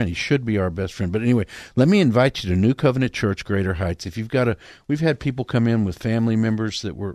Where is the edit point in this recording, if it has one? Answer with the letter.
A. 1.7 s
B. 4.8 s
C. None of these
C